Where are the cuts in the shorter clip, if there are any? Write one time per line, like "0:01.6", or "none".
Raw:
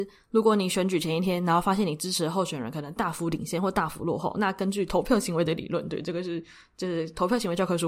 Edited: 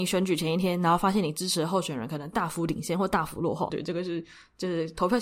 0:03.7